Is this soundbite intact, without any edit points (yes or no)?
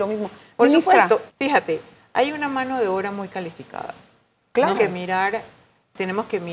no